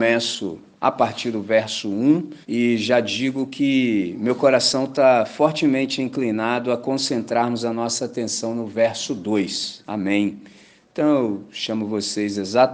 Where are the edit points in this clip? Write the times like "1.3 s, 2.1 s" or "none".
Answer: 2.4 s, 9.8 s